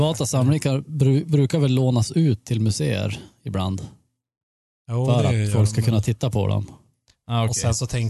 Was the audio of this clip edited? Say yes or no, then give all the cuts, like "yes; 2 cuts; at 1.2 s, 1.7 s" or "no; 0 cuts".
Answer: no; 0 cuts